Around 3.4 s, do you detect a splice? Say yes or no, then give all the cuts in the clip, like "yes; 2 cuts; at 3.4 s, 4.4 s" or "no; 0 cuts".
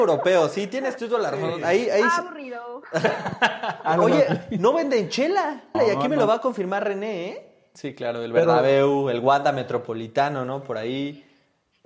no; 2 cuts; at 5.7 s, 7.7 s